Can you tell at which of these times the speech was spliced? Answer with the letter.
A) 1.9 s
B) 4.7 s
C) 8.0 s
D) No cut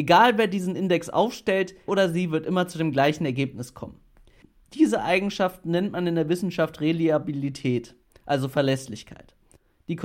A